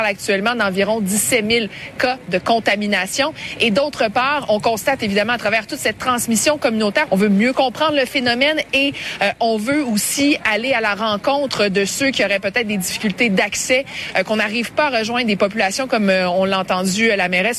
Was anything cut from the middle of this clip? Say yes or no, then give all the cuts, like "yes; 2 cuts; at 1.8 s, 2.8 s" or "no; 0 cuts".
yes; 1 cut; at 7.1 s